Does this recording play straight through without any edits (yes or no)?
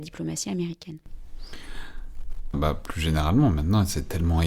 no